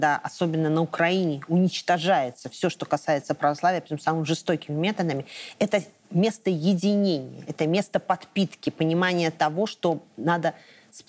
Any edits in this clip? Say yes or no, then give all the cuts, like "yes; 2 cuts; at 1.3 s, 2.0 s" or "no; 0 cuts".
no; 0 cuts